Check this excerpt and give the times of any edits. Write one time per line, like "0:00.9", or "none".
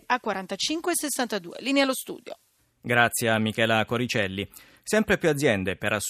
none